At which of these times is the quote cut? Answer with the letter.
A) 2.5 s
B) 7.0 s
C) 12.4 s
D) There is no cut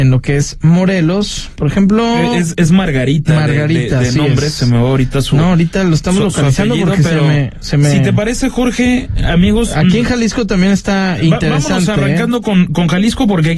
A